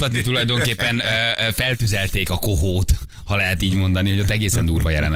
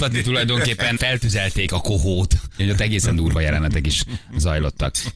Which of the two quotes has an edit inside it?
second; 2 cuts; at 1.0 s, 2.6 s

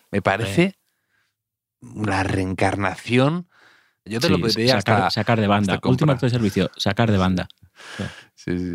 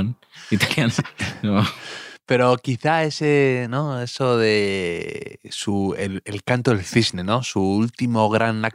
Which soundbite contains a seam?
first; 1 cut; at 4.1 s

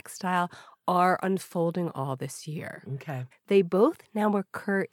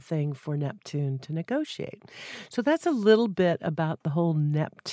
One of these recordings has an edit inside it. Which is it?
first; 1 cut; at 3.3 s

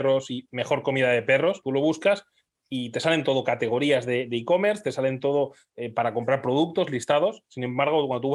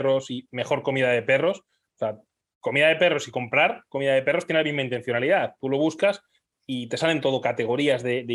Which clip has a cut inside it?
first; 1 cut; at 1.6 s

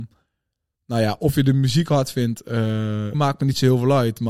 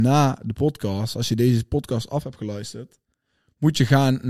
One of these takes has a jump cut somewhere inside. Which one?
first; 1 cut; at 3.1 s

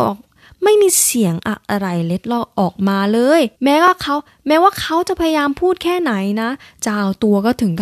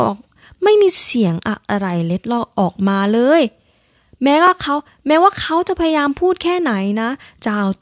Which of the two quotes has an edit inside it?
first; 1 cut; at 3.5 s

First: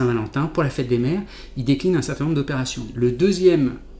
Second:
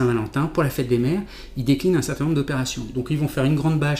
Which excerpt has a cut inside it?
first; 1 cut; at 2.9 s

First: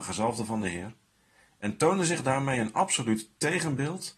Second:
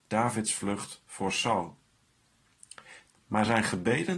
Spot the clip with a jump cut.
second; 1 cut; at 3.1 s

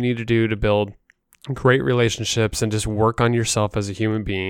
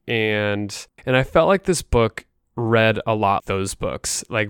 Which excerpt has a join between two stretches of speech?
second; 2 cuts; at 1.0 s, 3.4 s

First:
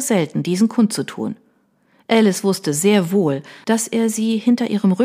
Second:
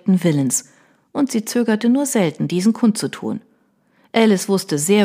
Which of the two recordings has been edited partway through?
first; 1 cut; at 3.6 s

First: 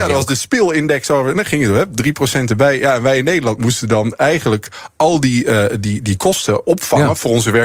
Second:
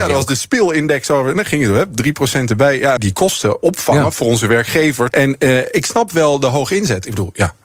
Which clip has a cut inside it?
second; 2 cuts; at 3.0 s, 5.1 s

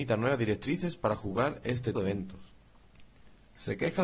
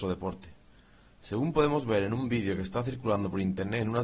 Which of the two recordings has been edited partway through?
first; 1 cut; at 2.0 s

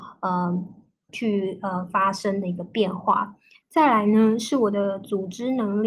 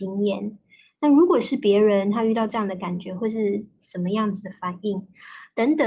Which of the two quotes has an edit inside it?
first; 2 cuts; at 1.1 s, 3.6 s

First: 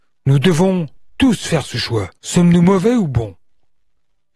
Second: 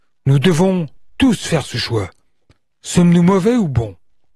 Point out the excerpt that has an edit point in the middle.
first; 1 cut; at 2.2 s

